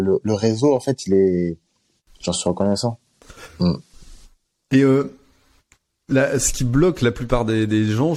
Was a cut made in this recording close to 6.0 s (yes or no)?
no